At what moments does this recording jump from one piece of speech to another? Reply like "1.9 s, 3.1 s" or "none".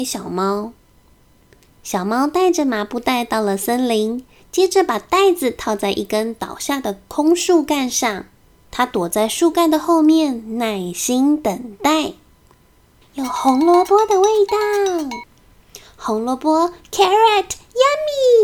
4.4 s, 13.0 s